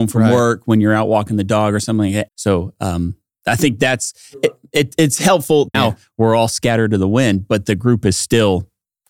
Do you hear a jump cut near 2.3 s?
yes; 2 cuts; at 2.3 s, 5.7 s

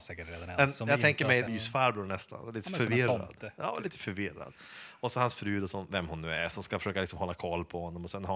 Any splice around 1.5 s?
yes; 1 cut; at 1.5 s

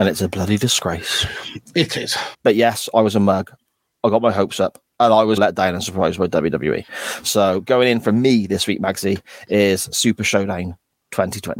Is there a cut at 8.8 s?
no; 2 cuts; at 2.3 s, 5.4 s

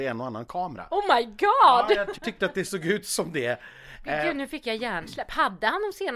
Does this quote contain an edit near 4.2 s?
no; 1 cut; at 2.1 s

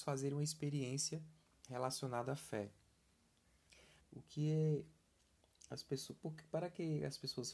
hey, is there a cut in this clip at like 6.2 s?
no; 1 cut; at 4.0 s

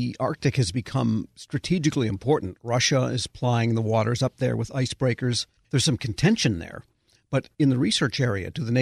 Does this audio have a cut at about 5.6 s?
yes; 1 cut; at 5.6 s

